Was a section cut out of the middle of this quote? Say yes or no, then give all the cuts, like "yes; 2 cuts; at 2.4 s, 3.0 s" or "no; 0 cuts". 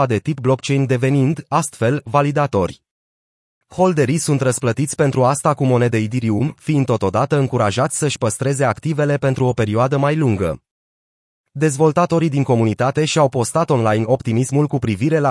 no; 0 cuts